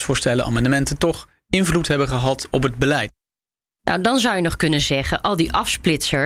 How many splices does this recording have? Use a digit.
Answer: 1